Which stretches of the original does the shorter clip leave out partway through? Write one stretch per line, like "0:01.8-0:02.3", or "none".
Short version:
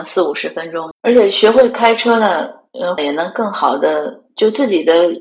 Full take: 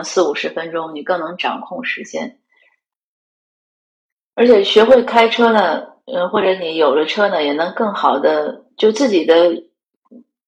0:00.9-0:04.2
0:06.3-0:07.4